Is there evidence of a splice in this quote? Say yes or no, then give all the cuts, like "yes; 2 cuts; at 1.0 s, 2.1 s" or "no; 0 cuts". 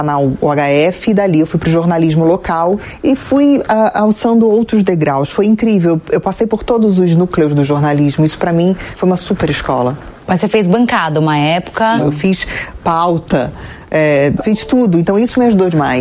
yes; 2 cuts; at 12.0 s, 14.4 s